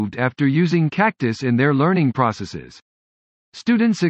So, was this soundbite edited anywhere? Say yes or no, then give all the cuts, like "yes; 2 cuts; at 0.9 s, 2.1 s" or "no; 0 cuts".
no; 0 cuts